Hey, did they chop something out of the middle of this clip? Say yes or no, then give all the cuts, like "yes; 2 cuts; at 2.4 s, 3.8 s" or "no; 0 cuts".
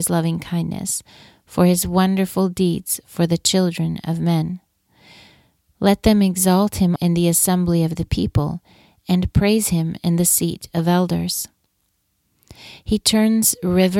yes; 1 cut; at 7.0 s